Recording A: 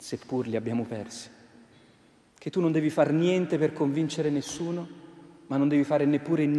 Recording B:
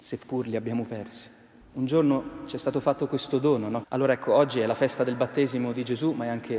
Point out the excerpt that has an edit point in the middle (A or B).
B